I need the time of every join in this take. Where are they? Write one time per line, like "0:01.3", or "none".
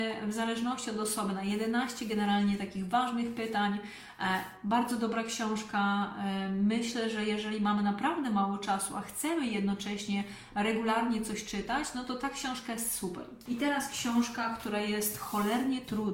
0:13.5